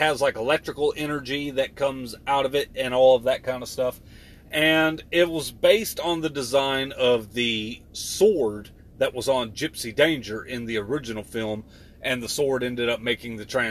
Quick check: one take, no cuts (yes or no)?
yes